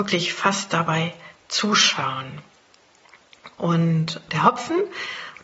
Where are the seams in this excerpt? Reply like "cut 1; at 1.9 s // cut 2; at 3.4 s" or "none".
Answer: cut 1; at 4.3 s

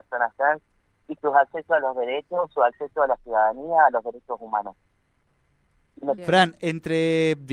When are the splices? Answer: cut 1; at 6.2 s

